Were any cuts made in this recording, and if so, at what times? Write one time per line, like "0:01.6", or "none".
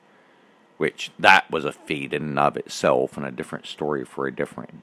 none